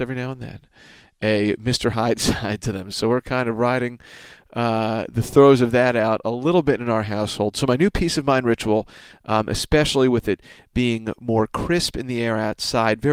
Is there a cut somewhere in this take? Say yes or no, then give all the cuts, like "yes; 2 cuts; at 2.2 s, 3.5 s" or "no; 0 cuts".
no; 0 cuts